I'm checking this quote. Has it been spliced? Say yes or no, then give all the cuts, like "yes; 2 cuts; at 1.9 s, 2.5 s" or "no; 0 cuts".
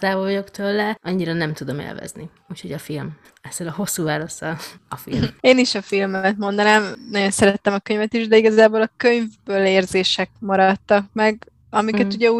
no; 0 cuts